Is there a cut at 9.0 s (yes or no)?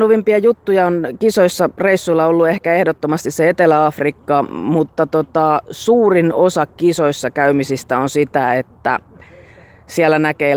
no